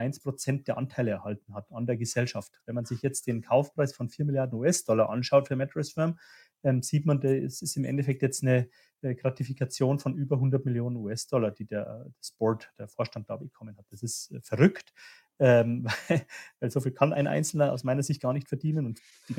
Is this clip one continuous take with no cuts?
yes; 0 cuts

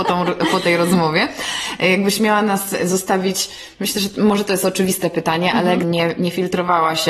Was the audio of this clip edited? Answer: yes; 1 cut; at 5.8 s

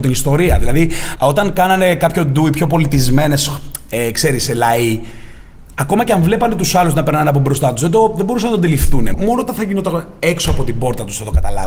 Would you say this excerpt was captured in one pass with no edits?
no; 2 cuts; at 1.2 s, 9.1 s

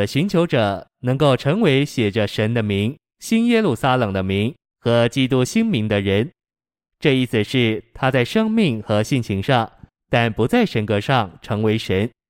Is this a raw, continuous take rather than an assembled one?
yes; 0 cuts

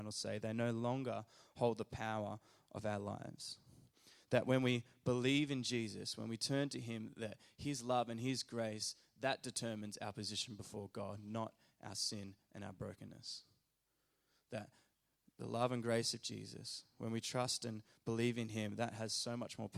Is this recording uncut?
yes; 0 cuts

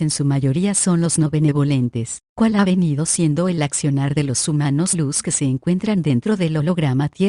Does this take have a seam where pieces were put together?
yes; 1 cut; at 2.3 s

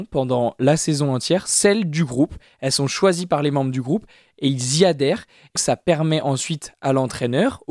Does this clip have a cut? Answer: yes; 1 cut; at 5.6 s

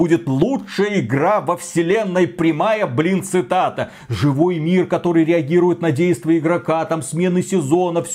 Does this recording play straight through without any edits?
yes; 0 cuts

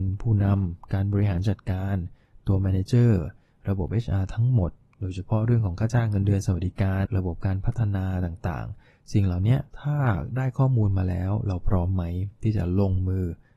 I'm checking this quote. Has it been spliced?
yes; 2 cuts; at 7.1 s, 9.7 s

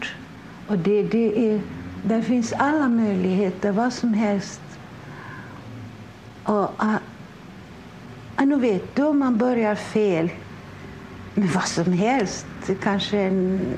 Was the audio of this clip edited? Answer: no; 0 cuts

